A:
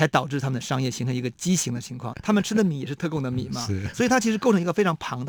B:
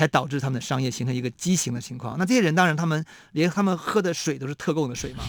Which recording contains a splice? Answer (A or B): A